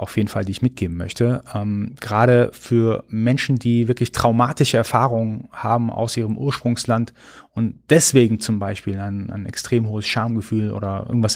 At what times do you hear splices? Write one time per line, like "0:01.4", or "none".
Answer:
none